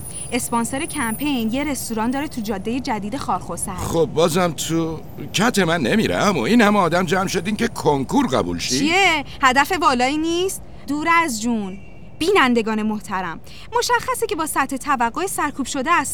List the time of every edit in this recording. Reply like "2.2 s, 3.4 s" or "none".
10.9 s

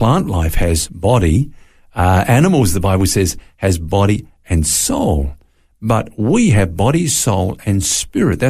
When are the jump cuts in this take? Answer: none

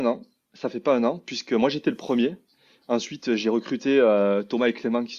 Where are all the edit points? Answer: none

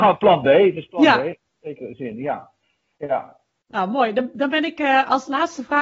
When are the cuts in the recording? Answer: none

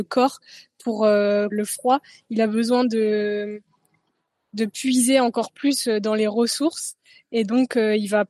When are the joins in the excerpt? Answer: 1.5 s

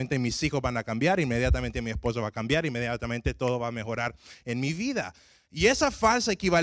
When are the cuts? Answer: 5.5 s

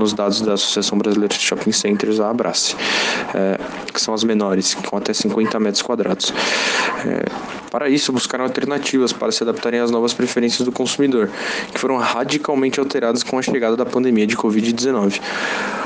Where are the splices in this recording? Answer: 3.9 s, 7.7 s

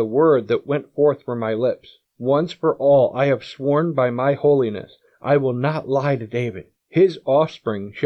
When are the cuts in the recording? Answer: none

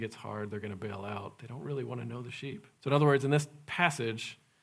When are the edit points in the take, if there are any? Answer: 2.7 s

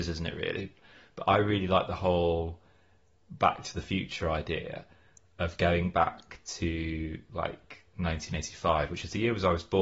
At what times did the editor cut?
none

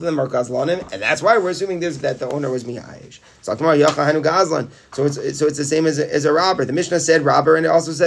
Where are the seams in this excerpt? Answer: 2.0 s

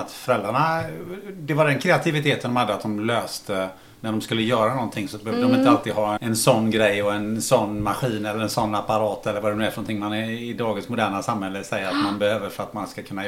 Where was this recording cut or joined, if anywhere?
6.2 s

